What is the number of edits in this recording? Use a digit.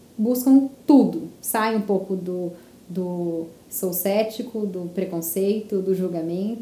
1